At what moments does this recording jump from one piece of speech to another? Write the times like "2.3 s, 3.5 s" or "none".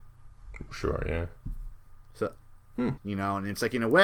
3.0 s